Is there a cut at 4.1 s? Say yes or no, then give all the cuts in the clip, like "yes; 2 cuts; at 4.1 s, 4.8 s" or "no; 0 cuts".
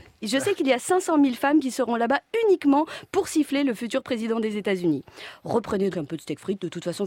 no; 1 cut; at 5.9 s